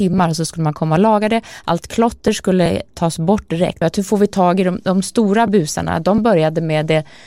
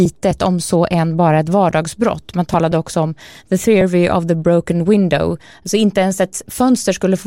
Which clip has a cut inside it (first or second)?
first